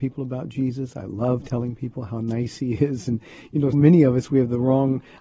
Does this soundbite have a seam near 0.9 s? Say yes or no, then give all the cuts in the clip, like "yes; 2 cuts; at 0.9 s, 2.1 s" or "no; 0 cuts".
no; 1 cut; at 3.7 s